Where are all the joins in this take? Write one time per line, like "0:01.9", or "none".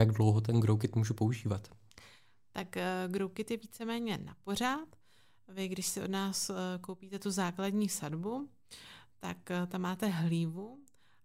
none

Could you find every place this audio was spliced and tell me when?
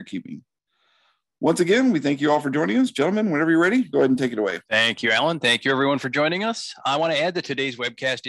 0:04.7

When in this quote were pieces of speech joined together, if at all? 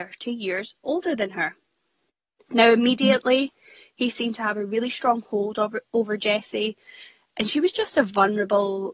0:02.5

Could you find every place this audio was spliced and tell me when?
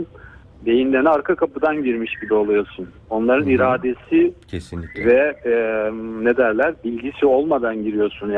none

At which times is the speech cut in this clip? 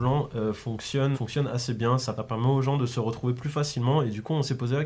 0:01.1
0:02.2

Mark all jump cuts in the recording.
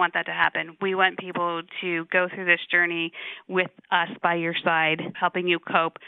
0:05.1

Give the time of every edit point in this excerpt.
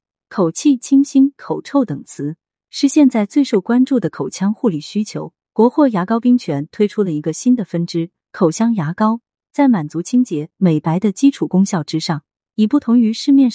0:05.4

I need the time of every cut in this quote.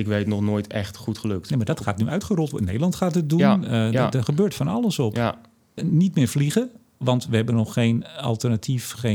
0:05.8

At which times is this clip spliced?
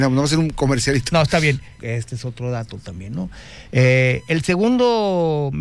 0:01.8
0:03.7

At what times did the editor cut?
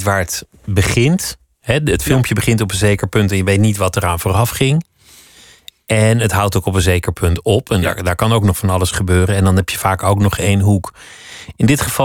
none

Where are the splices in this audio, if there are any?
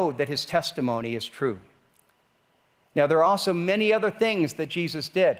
none

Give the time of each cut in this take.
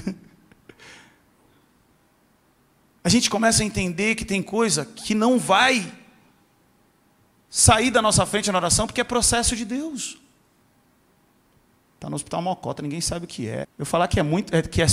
0:11.9
0:13.6

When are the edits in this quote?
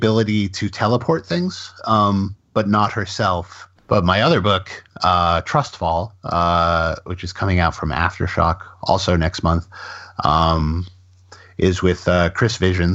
0:03.8

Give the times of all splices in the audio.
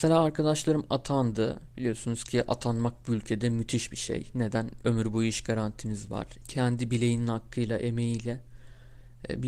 0:06.4

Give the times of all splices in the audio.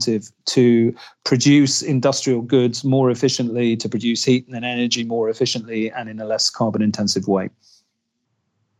none

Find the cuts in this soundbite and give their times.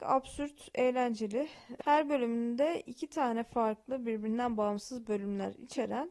none

